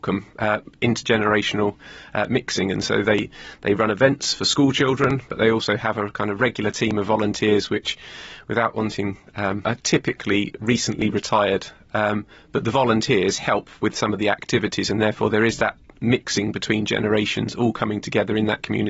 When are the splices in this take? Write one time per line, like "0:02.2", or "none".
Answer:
0:09.6